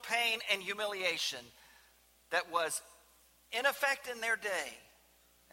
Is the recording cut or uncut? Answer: uncut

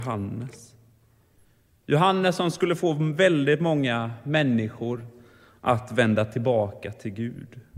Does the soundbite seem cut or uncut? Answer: uncut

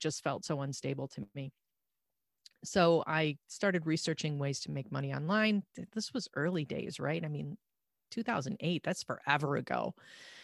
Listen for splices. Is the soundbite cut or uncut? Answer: uncut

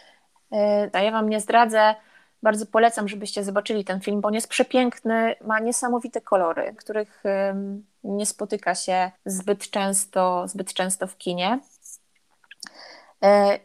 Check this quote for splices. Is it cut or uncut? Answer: cut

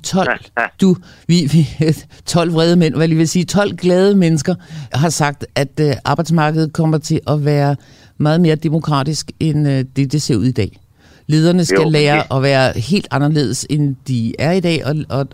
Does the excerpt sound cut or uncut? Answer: cut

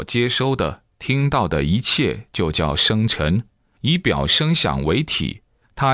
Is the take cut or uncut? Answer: uncut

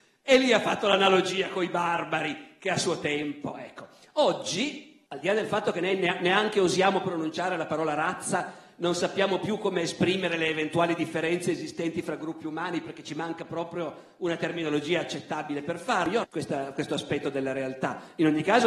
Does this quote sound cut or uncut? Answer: cut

